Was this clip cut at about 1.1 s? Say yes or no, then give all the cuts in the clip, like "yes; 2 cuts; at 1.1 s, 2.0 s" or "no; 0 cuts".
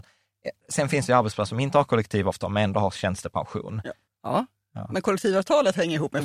no; 1 cut; at 4.1 s